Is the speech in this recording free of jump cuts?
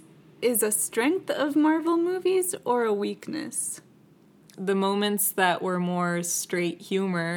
no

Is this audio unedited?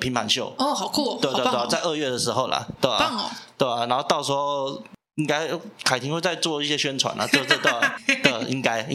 no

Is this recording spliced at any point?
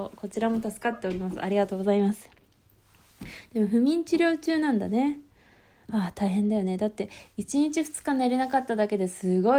no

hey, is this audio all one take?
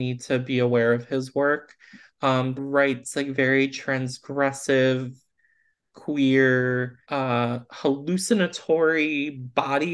no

